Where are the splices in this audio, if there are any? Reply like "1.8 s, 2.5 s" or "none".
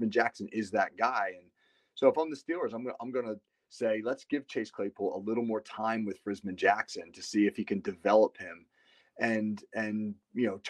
none